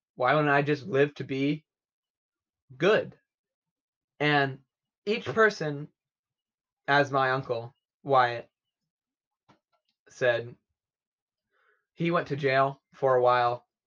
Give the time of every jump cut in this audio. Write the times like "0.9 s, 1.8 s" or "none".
4.0 s